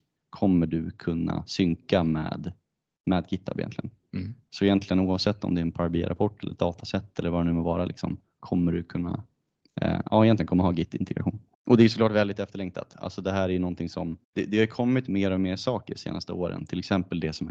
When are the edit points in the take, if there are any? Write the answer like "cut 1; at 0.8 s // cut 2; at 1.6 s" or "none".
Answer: cut 1; at 11.5 s // cut 2; at 14.2 s